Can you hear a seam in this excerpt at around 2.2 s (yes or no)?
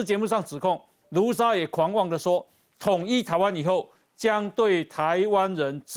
no